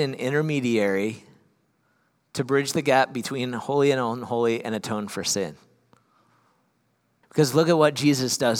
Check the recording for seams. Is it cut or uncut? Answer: cut